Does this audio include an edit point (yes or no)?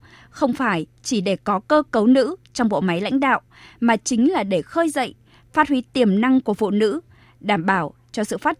no